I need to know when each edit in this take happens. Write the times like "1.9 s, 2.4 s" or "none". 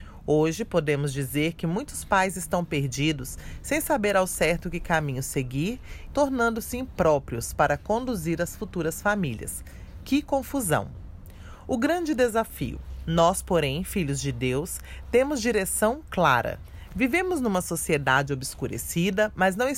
6.1 s